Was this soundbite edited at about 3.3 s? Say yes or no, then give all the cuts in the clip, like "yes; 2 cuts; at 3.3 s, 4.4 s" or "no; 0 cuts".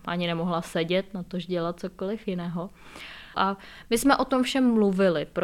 yes; 1 cut; at 3.3 s